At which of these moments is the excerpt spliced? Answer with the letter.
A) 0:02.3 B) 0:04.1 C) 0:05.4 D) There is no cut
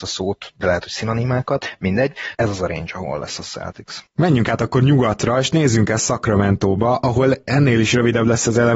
A